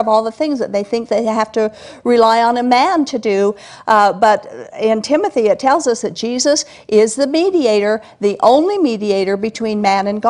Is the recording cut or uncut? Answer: uncut